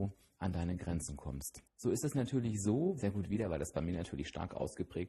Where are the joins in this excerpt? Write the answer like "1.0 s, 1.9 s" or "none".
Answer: 1.6 s, 3.0 s